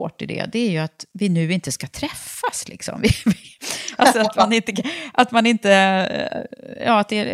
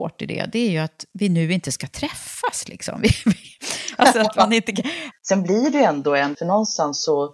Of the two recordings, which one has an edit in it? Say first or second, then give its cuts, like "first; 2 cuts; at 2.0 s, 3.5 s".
second; 2 cuts; at 5.1 s, 6.3 s